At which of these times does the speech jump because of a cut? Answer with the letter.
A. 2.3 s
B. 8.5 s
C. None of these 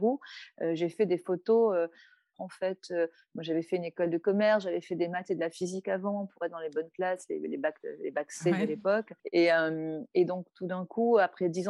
A